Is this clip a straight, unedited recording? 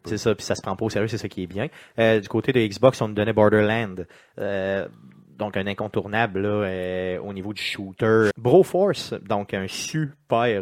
no; 1 cut; at 8.3 s

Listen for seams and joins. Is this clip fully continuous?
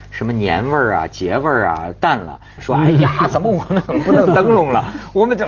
no; 1 cut; at 2.6 s

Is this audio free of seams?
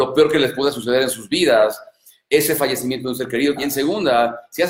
no; 1 cut; at 3.6 s

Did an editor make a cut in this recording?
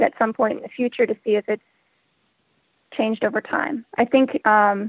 no; 0 cuts

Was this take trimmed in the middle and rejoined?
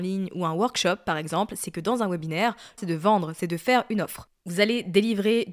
yes; 1 cut; at 2.8 s

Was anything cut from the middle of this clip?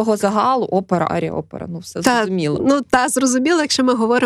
yes; 1 cut; at 1.1 s

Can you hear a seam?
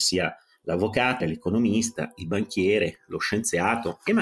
yes; 1 cut; at 1.2 s

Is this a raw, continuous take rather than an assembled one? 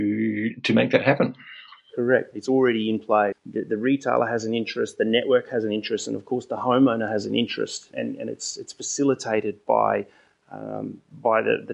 no; 3 cuts; at 2.3 s, 3.3 s, 7.9 s

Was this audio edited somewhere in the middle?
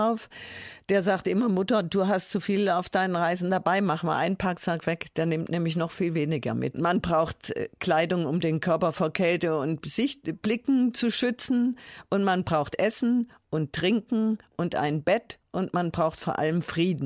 yes; 1 cut; at 6.7 s

